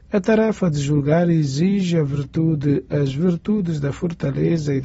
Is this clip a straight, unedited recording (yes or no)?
yes